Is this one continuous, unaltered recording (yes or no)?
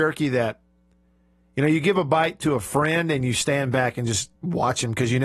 yes